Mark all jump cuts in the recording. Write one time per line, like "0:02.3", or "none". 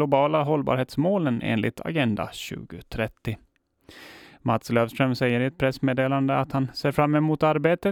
none